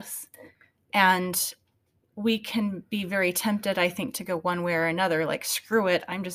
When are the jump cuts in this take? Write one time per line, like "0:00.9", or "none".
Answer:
none